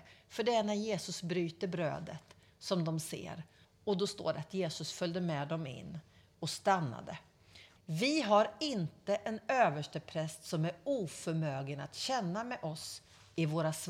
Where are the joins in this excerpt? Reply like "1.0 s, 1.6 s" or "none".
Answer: 3.6 s, 7.8 s